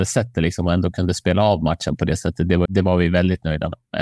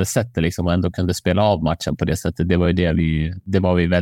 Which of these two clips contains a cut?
first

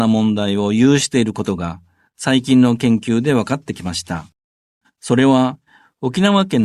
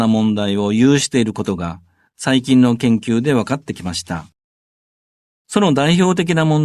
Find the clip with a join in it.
first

